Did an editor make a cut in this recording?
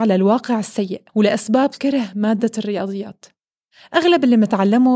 yes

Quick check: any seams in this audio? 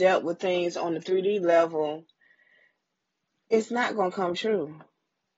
no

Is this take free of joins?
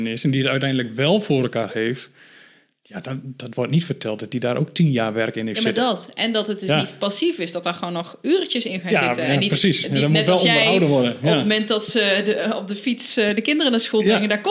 yes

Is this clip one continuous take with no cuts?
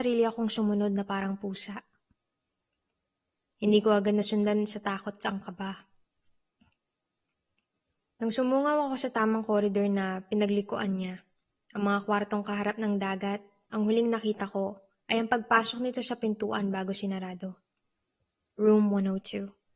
yes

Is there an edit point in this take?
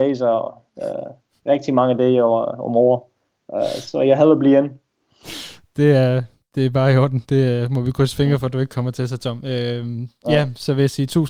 no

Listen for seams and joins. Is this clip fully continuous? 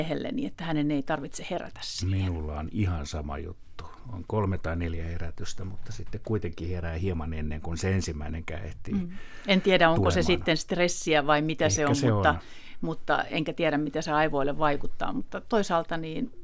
yes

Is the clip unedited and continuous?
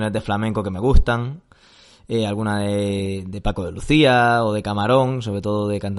yes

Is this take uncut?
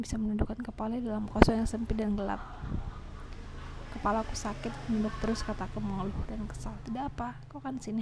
yes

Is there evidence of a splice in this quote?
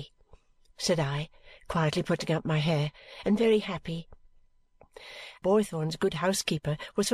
yes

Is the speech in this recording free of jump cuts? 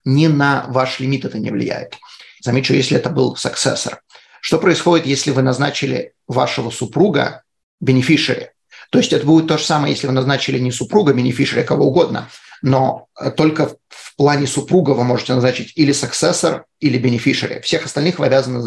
yes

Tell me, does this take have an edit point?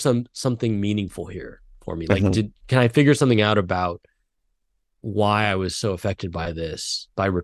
no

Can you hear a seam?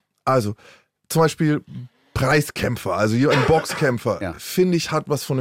no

